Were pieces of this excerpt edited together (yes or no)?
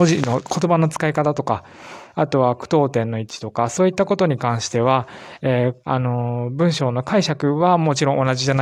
yes